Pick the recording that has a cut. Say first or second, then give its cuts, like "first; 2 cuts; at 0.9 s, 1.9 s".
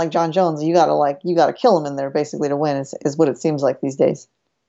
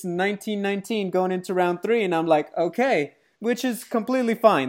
second; 1 cut; at 3.3 s